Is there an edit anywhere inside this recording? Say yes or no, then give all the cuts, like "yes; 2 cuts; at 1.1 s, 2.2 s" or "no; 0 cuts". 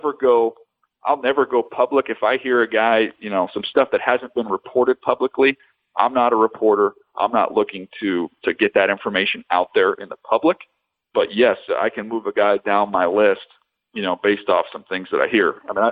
no; 0 cuts